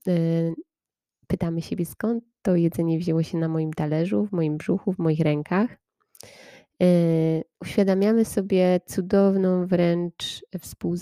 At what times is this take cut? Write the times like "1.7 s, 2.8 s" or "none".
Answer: 1.1 s, 7.5 s